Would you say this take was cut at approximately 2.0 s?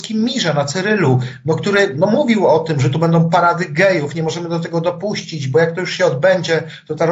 no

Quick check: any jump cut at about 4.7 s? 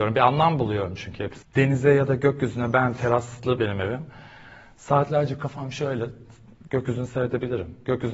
no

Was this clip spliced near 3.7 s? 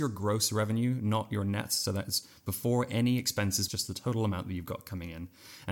yes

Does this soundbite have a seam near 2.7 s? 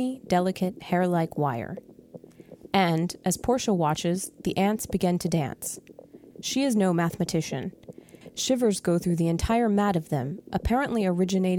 no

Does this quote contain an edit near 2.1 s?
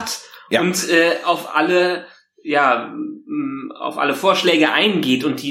no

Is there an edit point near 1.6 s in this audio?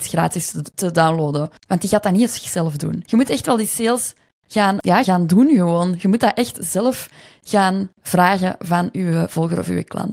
yes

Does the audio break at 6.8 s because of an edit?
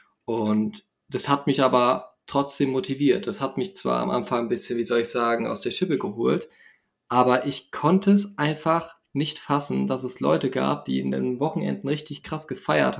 no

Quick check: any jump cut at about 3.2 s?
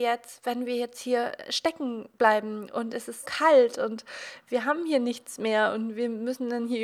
yes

